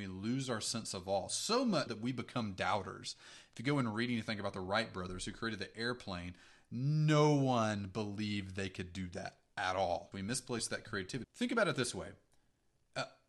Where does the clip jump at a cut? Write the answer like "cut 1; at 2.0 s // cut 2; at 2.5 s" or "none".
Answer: cut 1; at 1.9 s // cut 2; at 10.1 s // cut 3; at 11.2 s

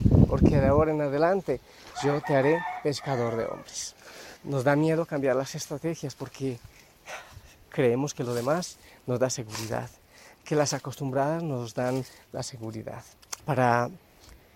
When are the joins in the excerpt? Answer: cut 1; at 4.4 s // cut 2; at 13.4 s

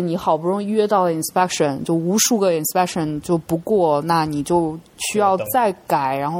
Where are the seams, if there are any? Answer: cut 1; at 5.5 s

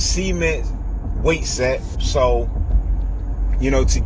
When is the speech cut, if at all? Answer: cut 1; at 1.9 s

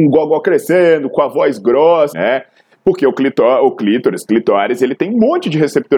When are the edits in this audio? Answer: cut 1; at 2.1 s

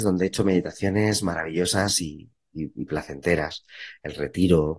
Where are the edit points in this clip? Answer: none

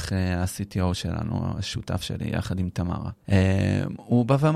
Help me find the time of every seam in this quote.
cut 1; at 3.2 s

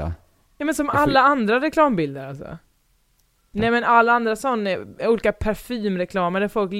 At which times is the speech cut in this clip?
cut 1; at 3.5 s

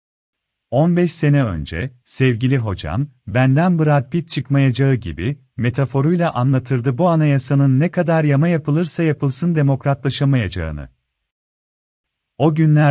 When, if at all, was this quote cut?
cut 1; at 2.0 s

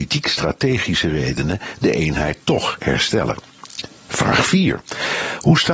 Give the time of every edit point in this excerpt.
cut 1; at 4.0 s

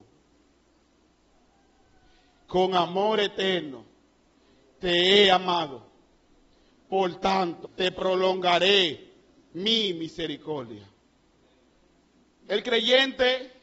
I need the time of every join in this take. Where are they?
cut 1; at 7.6 s

